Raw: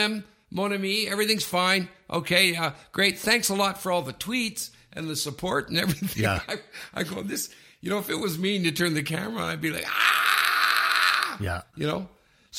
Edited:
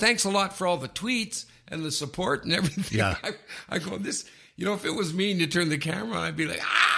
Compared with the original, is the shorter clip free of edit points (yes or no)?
yes